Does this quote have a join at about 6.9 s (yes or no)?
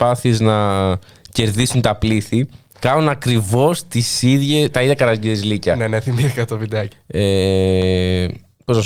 yes